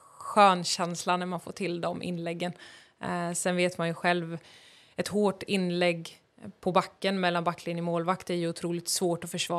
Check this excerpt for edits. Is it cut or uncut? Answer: uncut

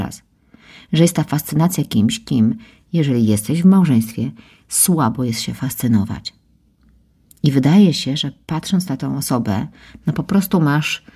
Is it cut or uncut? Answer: uncut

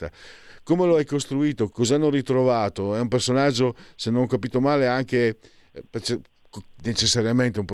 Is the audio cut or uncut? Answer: cut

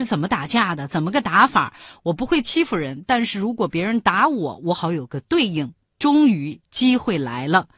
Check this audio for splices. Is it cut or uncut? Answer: uncut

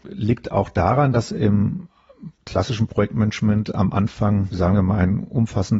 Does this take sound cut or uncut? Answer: uncut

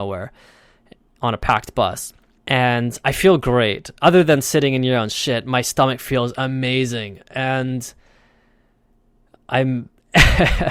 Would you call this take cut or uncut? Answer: cut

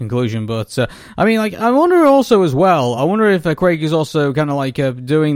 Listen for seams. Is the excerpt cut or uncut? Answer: uncut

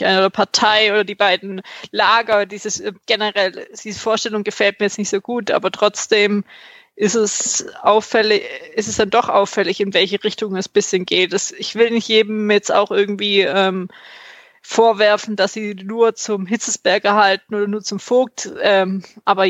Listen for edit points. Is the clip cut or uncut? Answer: uncut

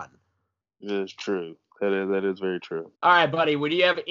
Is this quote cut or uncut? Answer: cut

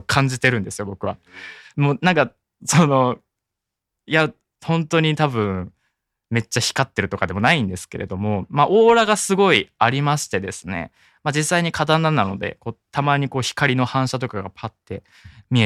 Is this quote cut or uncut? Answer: cut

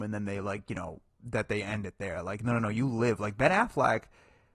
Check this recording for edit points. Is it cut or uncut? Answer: uncut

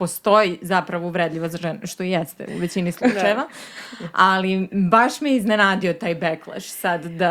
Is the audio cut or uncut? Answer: uncut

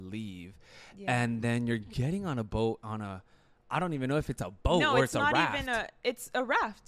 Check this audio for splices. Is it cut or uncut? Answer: uncut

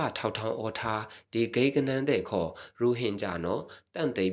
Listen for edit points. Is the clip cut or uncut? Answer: uncut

